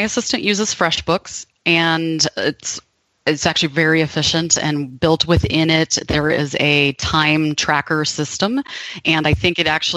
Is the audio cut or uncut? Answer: uncut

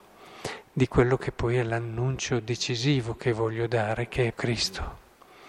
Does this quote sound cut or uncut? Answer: cut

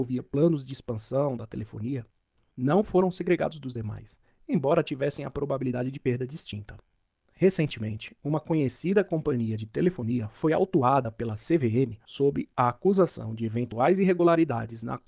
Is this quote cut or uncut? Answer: cut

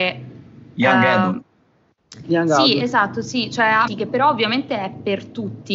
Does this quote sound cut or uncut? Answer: cut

